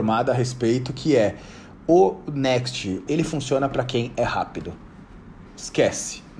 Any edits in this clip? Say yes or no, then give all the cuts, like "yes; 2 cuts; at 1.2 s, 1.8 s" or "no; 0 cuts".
yes; 3 cuts; at 1.7 s, 3.1 s, 5.5 s